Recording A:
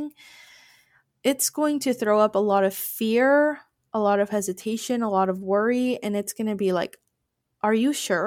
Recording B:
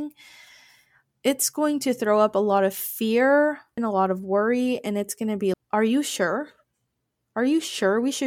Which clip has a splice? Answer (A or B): B